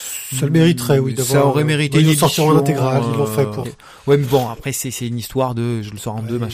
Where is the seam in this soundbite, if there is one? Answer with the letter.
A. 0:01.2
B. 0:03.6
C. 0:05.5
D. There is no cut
B